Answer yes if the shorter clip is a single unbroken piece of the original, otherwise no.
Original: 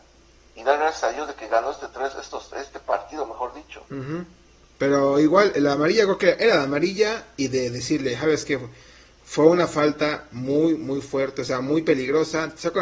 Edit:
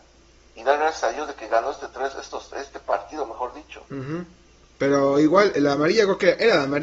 yes